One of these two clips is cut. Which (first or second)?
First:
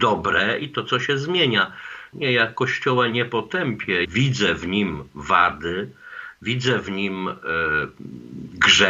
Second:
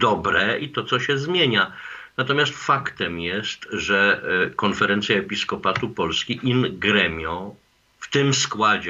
first